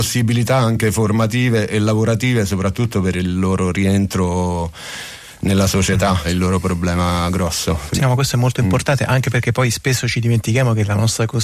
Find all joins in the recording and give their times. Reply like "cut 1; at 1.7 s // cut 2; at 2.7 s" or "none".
cut 1; at 6.2 s // cut 2; at 8.0 s